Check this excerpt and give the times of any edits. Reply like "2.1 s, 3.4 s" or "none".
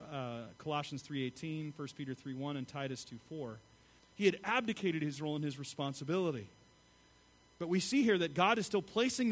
4.0 s